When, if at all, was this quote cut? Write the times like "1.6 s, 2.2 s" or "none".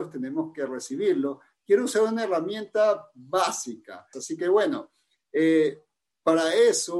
4.1 s